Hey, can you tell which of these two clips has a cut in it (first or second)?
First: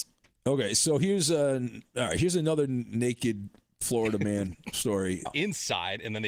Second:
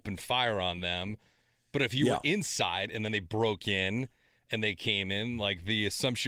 first